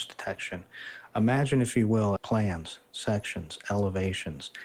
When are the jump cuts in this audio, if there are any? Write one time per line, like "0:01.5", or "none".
0:02.2